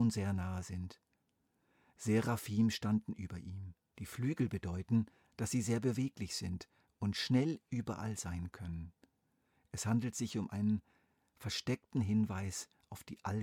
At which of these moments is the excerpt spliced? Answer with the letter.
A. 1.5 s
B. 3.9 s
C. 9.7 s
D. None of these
B